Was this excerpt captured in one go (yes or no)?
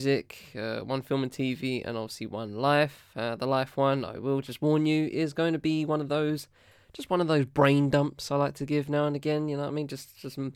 yes